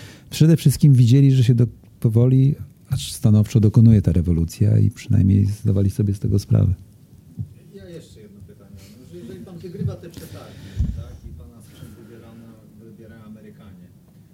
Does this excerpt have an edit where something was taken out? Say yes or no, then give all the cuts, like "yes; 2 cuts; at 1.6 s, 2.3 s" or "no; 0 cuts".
no; 0 cuts